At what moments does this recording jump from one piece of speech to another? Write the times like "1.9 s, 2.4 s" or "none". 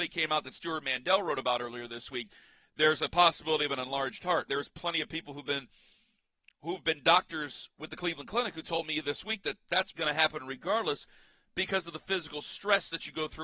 4.5 s, 9.9 s